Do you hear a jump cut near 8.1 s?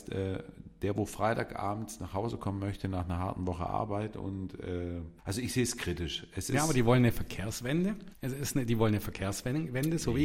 yes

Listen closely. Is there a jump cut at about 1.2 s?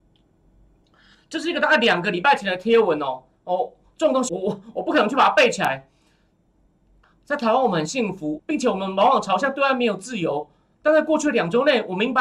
no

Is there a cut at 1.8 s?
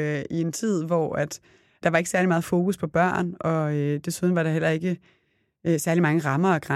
yes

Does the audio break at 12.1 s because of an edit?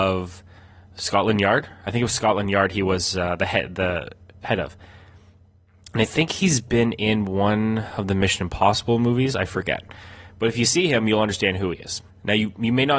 yes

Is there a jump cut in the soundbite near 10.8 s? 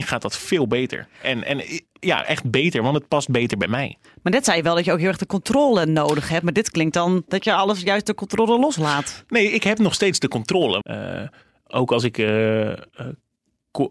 yes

